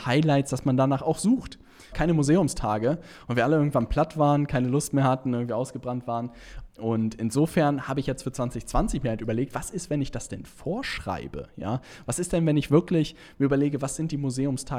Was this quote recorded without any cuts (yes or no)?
no